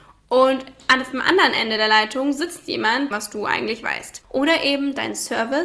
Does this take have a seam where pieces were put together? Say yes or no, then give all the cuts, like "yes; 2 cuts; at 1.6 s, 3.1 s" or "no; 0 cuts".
yes; 2 cuts; at 3.1 s, 4.2 s